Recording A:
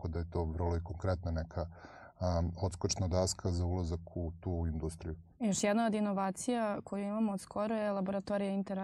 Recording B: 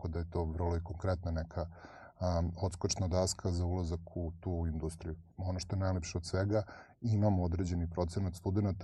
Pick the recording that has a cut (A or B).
B